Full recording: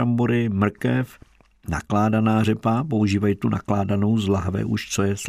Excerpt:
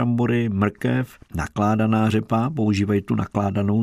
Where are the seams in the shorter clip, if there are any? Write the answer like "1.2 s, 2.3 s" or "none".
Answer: 1.2 s